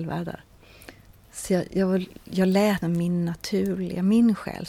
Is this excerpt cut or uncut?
uncut